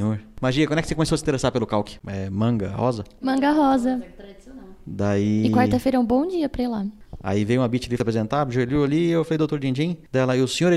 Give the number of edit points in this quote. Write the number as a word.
one